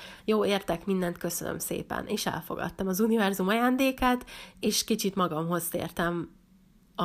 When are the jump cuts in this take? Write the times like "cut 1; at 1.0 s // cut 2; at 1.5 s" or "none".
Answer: none